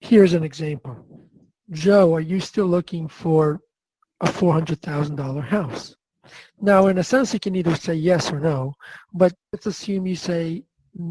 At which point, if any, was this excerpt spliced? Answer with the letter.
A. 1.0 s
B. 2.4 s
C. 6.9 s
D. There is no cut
D